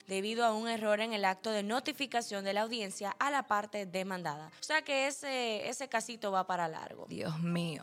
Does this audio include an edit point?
no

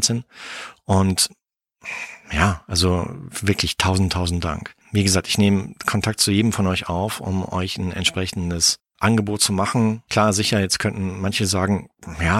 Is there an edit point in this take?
no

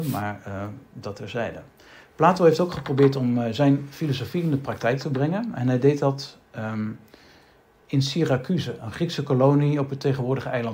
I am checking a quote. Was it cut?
no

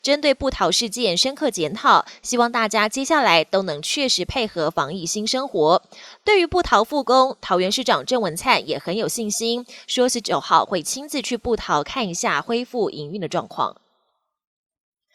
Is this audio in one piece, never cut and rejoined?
yes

